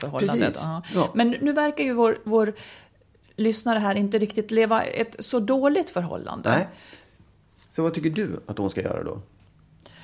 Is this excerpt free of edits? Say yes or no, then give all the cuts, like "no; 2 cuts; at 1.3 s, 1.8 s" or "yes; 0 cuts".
yes; 0 cuts